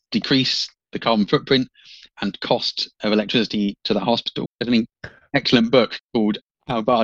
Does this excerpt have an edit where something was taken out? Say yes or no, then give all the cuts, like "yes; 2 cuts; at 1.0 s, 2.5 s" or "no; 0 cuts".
yes; 1 cut; at 4.4 s